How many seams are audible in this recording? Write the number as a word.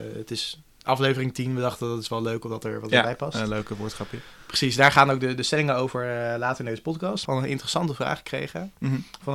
one